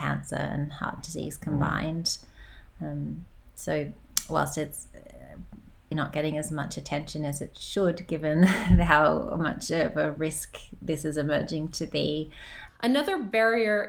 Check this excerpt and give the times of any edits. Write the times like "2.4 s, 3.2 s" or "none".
5.9 s, 12.7 s

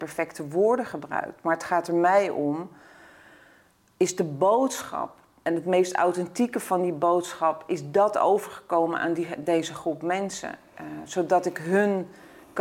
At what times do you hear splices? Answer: none

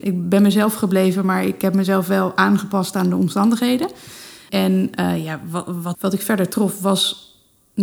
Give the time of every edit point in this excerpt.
5.9 s

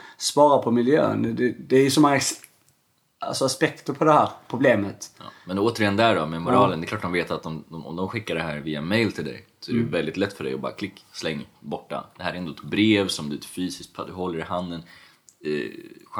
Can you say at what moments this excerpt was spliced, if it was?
none

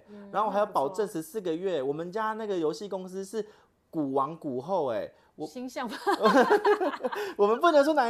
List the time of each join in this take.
none

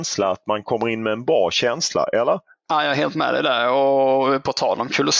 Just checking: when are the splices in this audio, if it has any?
none

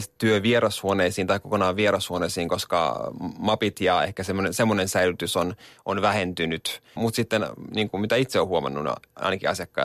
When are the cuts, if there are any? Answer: 7.0 s

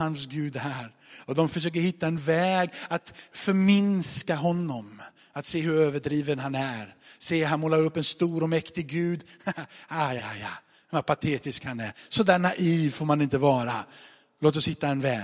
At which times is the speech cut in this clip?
10.2 s

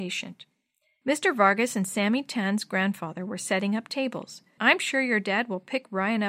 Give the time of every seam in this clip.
1.0 s, 4.6 s

